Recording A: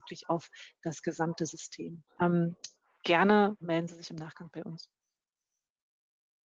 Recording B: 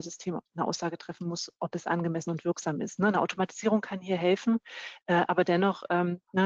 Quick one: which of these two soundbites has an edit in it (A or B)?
A